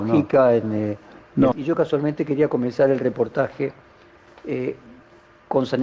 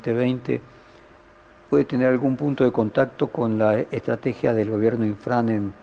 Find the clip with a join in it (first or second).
first